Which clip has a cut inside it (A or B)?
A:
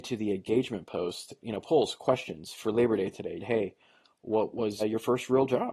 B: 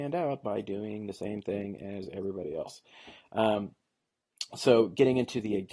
A